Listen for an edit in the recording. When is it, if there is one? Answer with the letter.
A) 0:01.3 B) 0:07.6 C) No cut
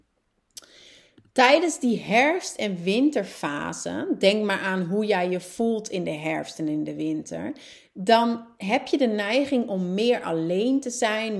C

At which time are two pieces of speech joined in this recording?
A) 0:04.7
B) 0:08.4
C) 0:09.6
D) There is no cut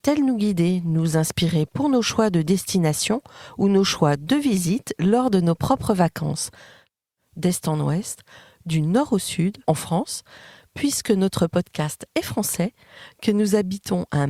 C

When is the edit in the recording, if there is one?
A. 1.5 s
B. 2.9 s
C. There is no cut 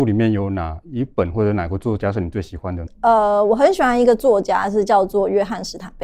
B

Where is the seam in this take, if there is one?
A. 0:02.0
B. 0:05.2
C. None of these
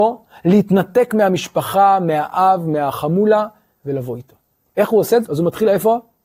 B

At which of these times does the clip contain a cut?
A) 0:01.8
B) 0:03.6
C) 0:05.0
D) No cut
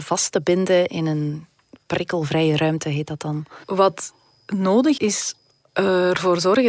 C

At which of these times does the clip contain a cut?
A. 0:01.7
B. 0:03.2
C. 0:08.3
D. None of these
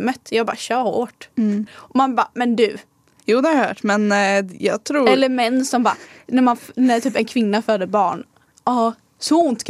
A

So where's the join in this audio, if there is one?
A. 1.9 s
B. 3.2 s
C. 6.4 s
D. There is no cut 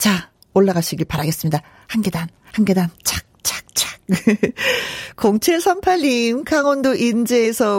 D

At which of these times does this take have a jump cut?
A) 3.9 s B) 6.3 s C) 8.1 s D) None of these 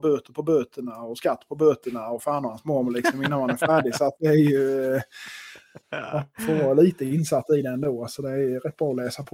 D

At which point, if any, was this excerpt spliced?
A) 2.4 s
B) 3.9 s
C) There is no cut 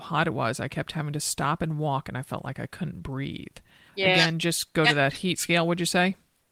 B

